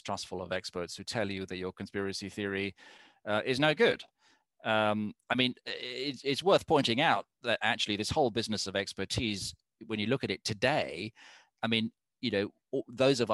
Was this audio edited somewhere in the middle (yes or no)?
no